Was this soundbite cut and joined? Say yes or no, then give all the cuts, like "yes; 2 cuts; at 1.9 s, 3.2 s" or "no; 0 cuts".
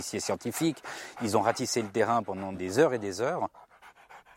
no; 0 cuts